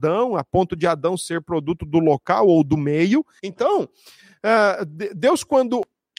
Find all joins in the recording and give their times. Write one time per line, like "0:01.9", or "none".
0:03.4